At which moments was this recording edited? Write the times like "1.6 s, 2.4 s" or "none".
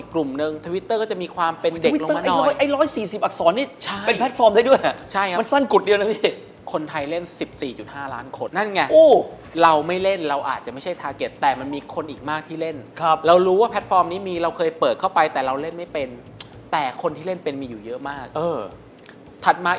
8.5 s